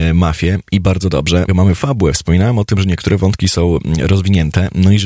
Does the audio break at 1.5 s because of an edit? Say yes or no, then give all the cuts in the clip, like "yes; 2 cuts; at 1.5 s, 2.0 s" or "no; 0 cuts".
yes; 1 cut; at 1.5 s